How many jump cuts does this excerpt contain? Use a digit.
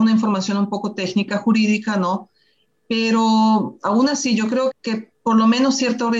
1